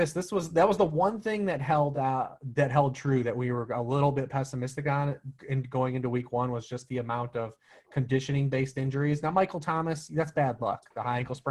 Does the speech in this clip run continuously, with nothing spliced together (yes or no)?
yes